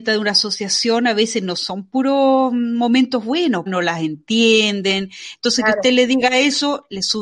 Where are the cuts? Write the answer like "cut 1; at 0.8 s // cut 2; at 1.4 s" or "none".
cut 1; at 3.7 s